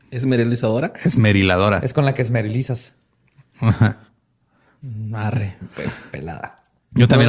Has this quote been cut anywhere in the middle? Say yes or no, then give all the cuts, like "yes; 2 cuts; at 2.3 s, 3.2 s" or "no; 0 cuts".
no; 0 cuts